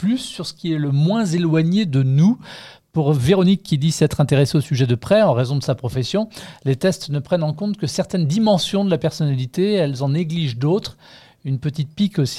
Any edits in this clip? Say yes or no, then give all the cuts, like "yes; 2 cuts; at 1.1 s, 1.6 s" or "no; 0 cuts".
no; 0 cuts